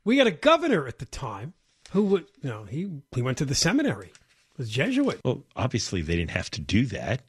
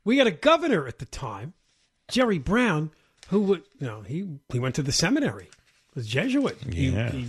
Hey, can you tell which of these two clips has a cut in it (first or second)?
first